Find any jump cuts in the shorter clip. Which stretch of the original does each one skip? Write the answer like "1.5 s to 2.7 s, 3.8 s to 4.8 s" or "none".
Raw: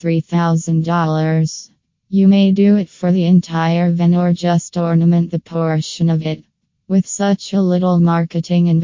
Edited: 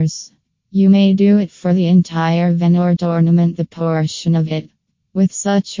4.3 s to 4.7 s

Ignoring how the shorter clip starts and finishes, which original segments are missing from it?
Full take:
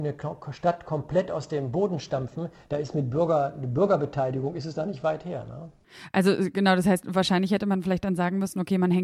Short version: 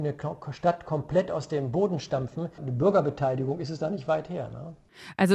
2.6 s to 3.5 s

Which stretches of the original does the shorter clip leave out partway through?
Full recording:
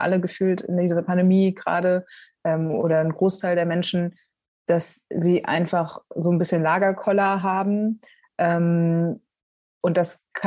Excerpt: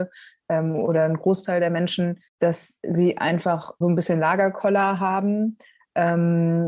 4.2 s to 4.5 s, 6.1 s to 6.2 s

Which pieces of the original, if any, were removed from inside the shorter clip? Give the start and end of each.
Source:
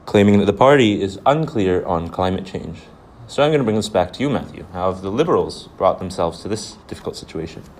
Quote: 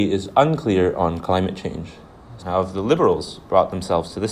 3.3 s to 4.7 s

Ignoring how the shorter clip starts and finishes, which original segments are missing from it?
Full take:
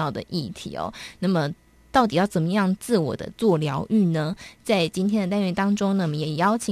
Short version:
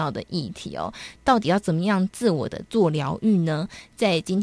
1.2 s to 1.8 s

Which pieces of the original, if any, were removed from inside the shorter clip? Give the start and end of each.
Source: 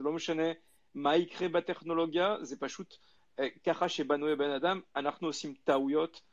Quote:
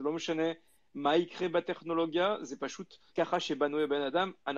3.1 s to 3.6 s

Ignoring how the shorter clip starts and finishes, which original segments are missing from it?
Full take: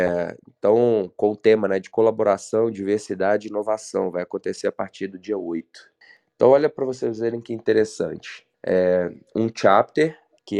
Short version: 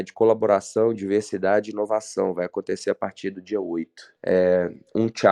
5.9 s to 8.6 s

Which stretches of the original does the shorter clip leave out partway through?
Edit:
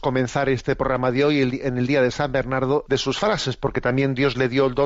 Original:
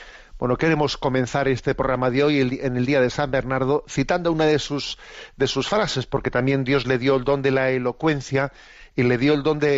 3.8 s to 5.4 s

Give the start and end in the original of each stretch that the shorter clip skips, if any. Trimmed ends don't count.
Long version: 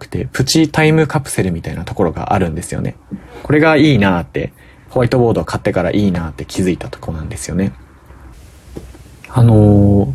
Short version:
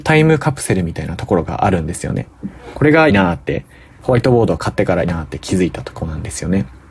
3.8 s to 4.0 s, 5.9 s to 6.1 s

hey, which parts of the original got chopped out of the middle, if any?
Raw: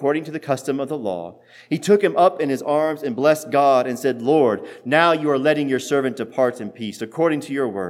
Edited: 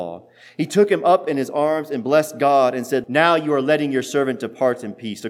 4.2 s to 4.8 s

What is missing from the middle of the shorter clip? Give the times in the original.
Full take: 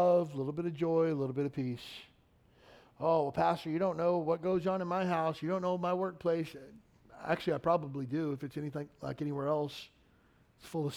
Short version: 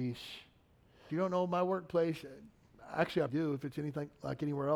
2.7 s to 5.4 s, 7.6 s to 8.1 s

